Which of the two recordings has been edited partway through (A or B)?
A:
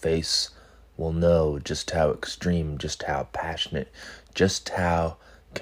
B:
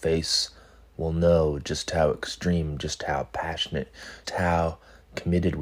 B